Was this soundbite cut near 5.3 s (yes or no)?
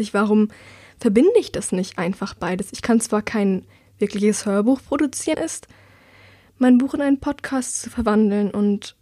yes